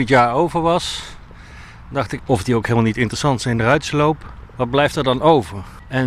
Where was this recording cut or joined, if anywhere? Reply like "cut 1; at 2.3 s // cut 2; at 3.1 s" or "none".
cut 1; at 2.2 s